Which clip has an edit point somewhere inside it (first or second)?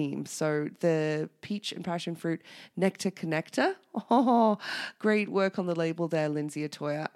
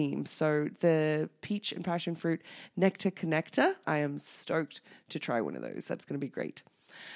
second